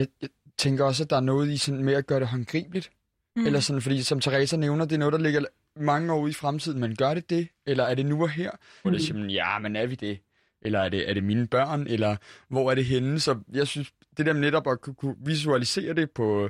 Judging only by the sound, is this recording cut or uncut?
cut